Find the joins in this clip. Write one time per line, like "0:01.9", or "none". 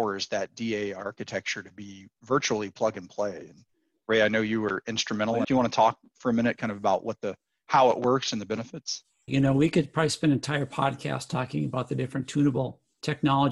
0:05.4
0:09.3